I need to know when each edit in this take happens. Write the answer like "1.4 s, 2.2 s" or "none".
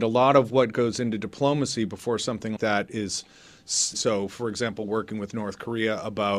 2.6 s, 3.9 s